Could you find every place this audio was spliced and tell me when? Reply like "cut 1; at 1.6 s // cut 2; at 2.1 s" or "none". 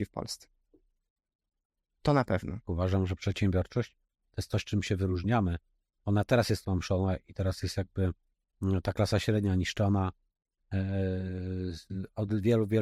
cut 1; at 2.6 s

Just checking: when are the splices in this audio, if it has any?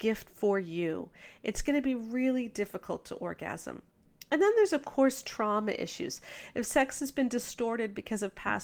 none

